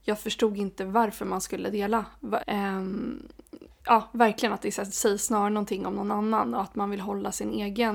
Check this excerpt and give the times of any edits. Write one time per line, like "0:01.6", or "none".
0:02.4
0:03.8